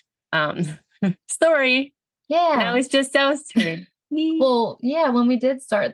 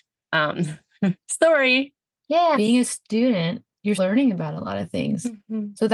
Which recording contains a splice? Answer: second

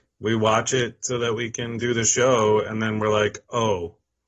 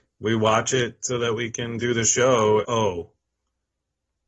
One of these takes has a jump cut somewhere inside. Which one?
second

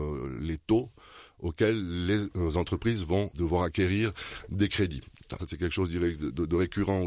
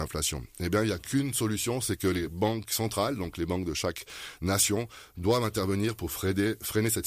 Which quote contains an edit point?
first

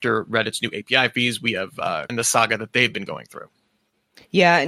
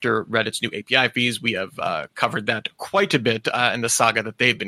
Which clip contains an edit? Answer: first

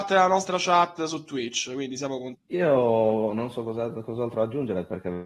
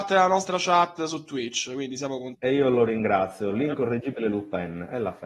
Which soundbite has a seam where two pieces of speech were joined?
first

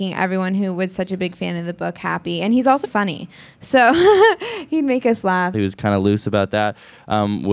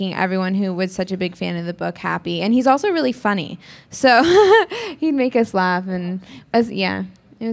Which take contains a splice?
first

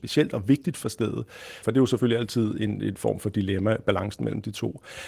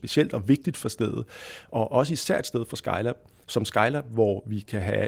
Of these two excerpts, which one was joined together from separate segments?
first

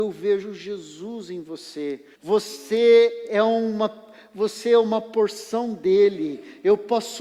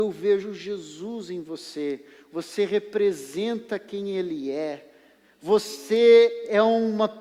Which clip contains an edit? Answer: first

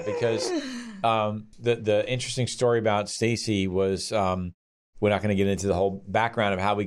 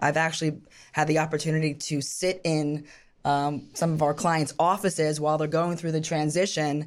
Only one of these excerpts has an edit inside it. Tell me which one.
first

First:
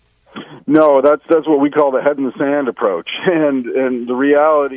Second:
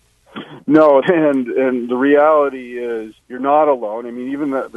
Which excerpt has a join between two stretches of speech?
second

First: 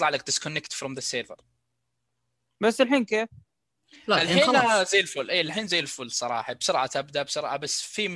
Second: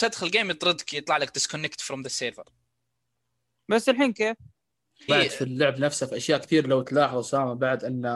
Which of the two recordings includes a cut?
second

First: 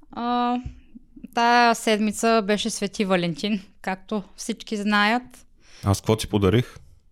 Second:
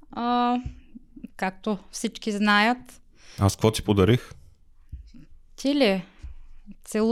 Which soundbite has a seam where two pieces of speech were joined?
second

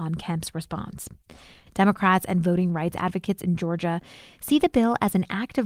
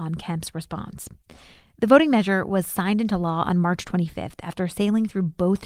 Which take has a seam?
first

